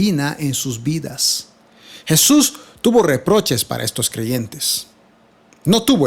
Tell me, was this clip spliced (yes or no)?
no